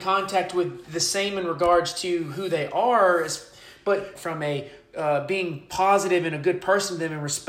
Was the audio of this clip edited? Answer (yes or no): yes